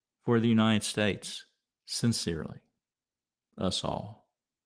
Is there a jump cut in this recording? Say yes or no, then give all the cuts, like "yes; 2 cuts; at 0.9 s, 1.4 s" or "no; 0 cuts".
yes; 1 cut; at 1.7 s